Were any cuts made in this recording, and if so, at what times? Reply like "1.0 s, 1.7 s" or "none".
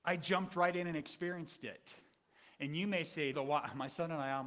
3.3 s